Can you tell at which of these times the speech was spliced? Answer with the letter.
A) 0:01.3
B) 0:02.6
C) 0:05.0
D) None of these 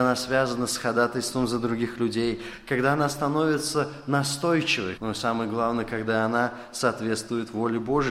C